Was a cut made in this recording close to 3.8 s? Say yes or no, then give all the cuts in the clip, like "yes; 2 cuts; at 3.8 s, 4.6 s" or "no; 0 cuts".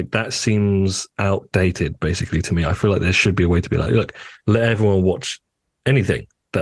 no; 0 cuts